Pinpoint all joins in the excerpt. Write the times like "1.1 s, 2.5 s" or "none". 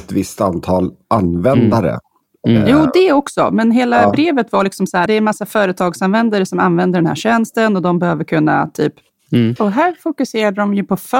5.1 s, 9.6 s